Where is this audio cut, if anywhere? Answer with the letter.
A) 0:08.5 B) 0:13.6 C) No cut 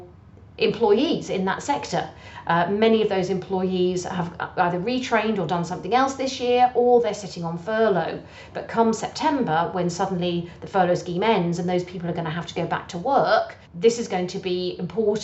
B